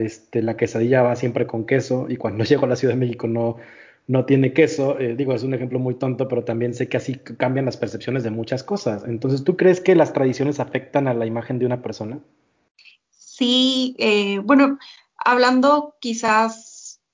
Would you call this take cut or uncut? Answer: uncut